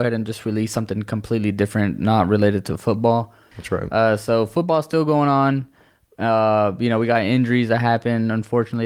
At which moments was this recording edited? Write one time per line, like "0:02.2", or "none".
0:03.5